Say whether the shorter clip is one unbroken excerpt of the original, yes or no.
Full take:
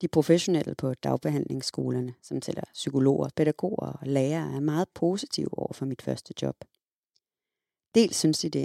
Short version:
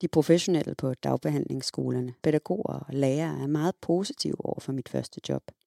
no